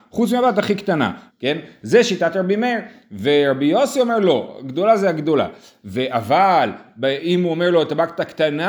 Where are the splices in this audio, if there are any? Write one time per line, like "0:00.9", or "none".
0:01.3